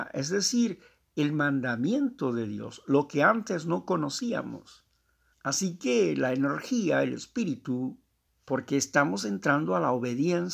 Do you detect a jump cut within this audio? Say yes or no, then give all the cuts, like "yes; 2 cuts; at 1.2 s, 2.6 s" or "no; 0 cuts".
yes; 2 cuts; at 5.3 s, 8.3 s